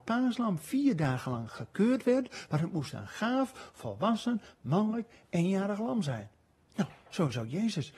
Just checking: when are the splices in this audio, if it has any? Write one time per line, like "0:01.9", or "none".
none

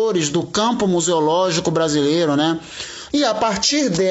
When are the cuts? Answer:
0:03.1

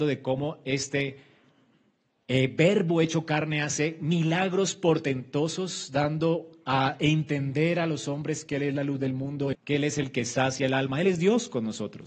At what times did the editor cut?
0:09.5

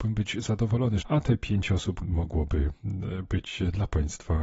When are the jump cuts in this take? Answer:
0:01.0
0:02.0

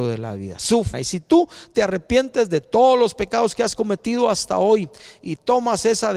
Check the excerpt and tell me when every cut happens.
0:00.9

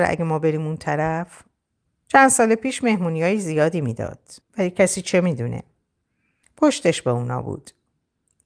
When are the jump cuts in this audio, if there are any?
0:01.9
0:04.4
0:06.4

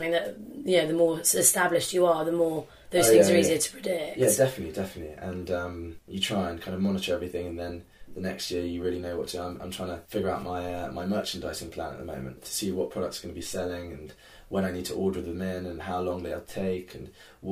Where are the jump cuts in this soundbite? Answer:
0:10.1
0:12.4

